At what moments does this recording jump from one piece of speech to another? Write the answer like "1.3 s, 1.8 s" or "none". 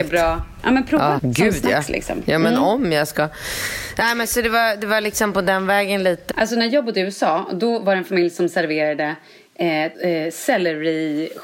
1.2 s, 6.3 s, 9.9 s